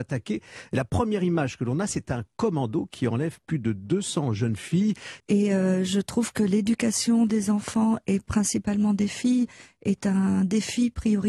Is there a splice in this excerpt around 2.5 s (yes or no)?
no